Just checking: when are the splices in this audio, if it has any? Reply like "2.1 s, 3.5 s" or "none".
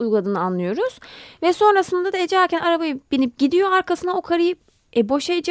none